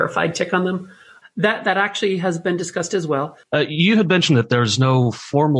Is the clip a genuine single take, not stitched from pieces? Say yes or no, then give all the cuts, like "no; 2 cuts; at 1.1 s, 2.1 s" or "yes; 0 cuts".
no; 2 cuts; at 1.2 s, 3.4 s